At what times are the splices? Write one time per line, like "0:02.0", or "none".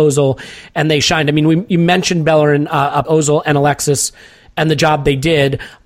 0:03.0